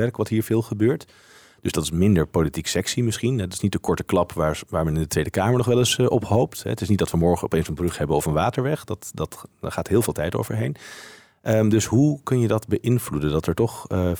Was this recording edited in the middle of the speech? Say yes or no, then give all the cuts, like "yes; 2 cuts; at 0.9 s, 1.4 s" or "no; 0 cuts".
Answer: no; 0 cuts